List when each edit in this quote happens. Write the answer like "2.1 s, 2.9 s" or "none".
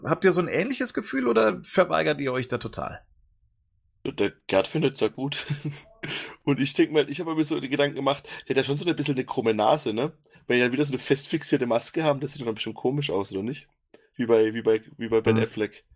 none